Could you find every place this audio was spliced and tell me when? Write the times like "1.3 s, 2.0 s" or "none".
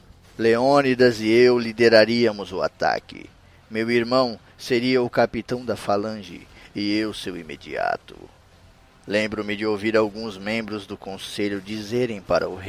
none